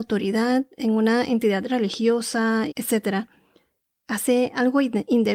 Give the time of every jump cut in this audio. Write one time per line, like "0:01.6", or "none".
0:02.7

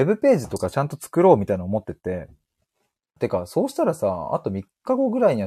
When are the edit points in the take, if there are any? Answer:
0:03.2

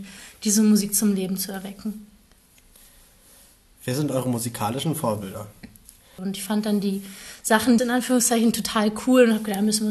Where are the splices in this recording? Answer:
0:06.2
0:07.8

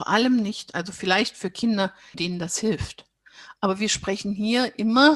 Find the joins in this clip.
0:02.1

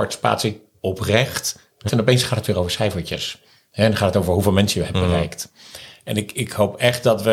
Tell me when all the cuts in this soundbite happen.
0:01.9

